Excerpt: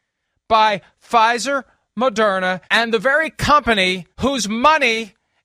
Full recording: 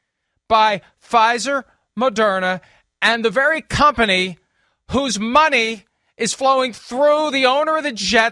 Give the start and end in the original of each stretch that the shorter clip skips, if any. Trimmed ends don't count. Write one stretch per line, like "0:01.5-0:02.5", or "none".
0:02.7-0:03.0
0:04.4-0:04.8